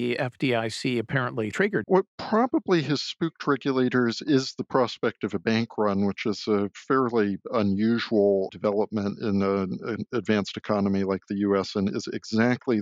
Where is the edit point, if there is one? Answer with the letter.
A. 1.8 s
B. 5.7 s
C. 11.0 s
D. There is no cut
A